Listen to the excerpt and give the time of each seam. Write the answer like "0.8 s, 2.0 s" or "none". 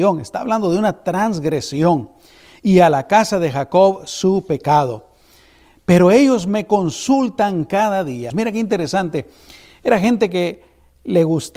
8.3 s